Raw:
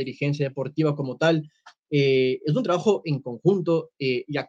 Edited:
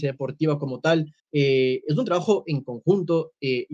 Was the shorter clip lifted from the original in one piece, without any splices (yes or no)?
no